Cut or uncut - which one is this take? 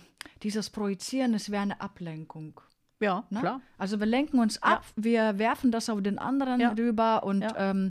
uncut